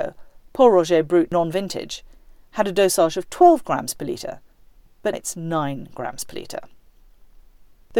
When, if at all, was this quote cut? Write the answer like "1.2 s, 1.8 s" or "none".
5.1 s